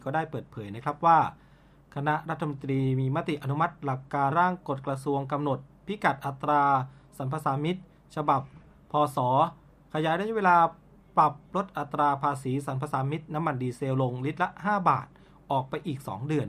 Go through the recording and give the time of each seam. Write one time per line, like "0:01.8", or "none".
0:04.3